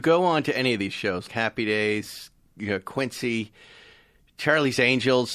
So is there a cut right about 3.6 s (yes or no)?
no